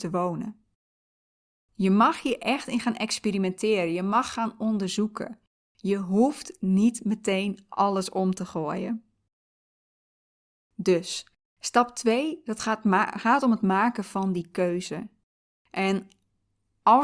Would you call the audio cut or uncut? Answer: uncut